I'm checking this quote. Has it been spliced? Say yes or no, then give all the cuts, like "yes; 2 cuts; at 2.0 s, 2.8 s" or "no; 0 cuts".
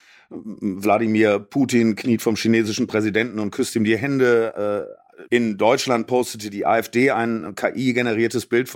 yes; 1 cut; at 5.3 s